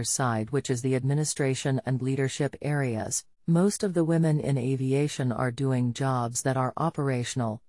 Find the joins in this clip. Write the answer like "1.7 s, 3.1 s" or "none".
3.3 s

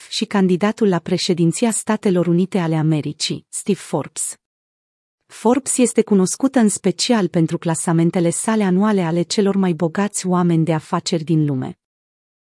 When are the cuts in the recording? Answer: none

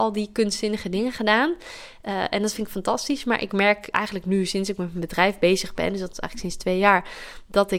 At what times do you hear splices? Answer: 3.9 s

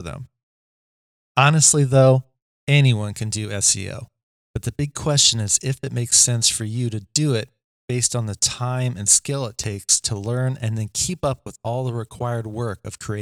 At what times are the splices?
none

